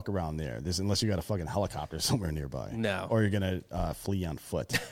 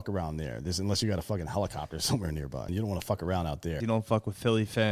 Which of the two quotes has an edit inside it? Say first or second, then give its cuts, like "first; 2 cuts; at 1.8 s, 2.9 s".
second; 2 cuts; at 2.7 s, 3.8 s